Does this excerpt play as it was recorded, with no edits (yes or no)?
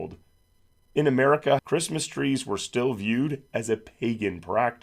no